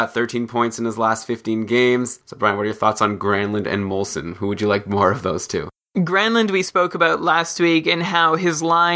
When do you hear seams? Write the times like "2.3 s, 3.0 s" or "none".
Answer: 2.2 s